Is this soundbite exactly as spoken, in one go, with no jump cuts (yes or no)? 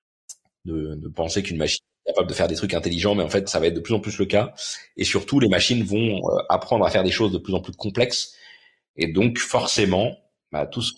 no